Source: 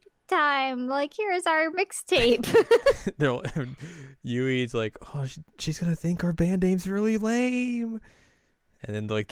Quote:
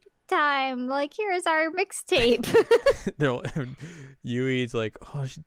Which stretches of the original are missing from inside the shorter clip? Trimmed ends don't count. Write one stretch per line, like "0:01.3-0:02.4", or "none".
none